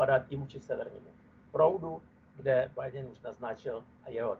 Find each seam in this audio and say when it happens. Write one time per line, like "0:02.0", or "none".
none